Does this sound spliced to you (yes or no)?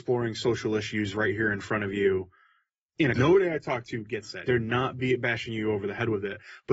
yes